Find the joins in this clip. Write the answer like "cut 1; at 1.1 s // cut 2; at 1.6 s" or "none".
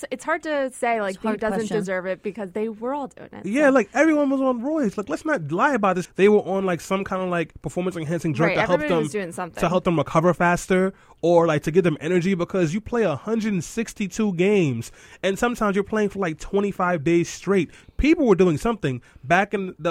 cut 1; at 6.0 s